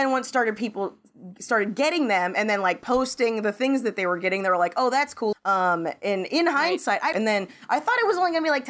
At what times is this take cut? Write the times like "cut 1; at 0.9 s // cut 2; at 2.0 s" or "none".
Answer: cut 1; at 5.3 s // cut 2; at 7.1 s